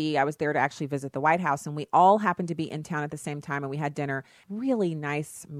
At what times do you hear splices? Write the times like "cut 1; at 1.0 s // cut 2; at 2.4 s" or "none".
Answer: cut 1; at 4.4 s